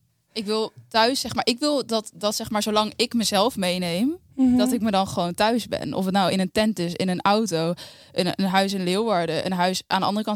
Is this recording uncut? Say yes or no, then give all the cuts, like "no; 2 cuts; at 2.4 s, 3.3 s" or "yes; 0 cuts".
yes; 0 cuts